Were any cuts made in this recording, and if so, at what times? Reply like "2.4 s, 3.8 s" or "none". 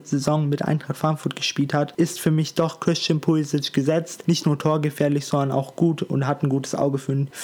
4.2 s